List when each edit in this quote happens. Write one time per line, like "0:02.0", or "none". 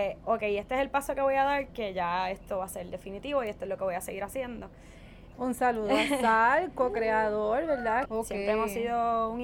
0:05.3
0:08.0